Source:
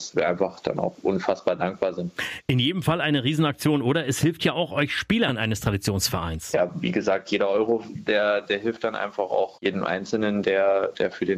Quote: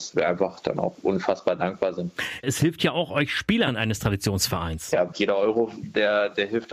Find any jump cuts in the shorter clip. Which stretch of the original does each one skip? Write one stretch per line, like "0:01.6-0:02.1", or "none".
0:02.4-0:04.0
0:06.7-0:07.2